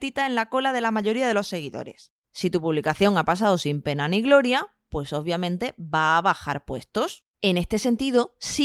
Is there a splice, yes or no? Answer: no